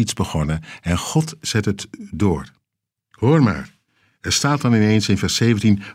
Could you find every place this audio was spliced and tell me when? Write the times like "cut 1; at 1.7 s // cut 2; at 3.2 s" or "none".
none